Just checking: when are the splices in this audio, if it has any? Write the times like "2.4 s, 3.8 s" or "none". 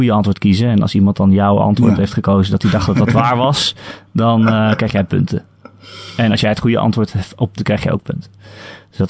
7.6 s